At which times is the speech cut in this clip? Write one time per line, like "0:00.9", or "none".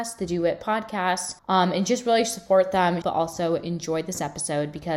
0:01.4
0:03.0